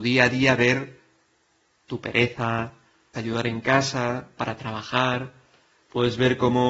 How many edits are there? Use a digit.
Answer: 2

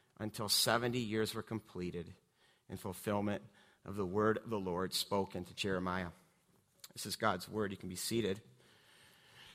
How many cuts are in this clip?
0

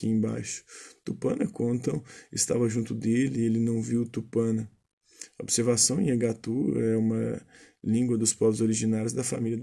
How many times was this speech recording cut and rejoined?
0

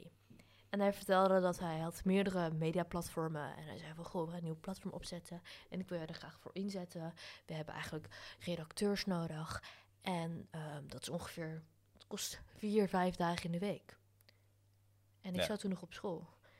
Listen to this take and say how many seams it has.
0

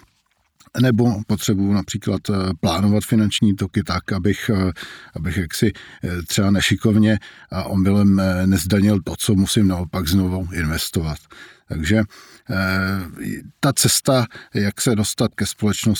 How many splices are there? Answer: 0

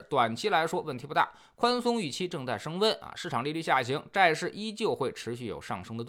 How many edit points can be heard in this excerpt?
0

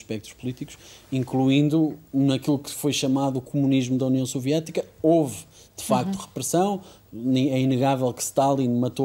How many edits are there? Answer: 0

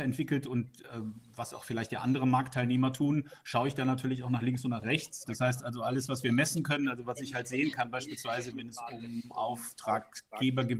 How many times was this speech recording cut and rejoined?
2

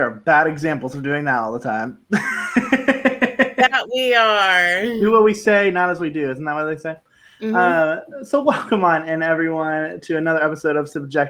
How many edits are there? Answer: 0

